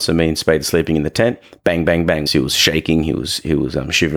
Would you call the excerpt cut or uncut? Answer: cut